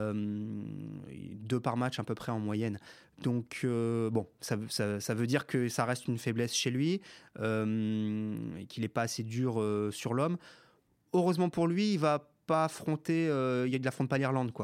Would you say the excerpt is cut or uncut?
uncut